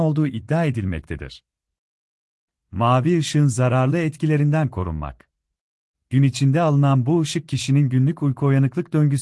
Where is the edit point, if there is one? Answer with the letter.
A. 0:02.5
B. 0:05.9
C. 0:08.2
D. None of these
B